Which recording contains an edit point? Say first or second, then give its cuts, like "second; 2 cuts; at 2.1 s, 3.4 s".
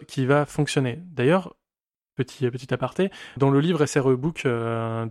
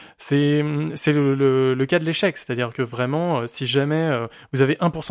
first; 1 cut; at 3.4 s